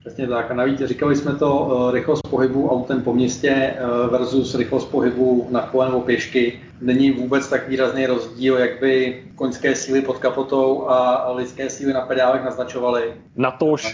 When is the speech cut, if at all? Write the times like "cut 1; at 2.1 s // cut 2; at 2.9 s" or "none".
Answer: none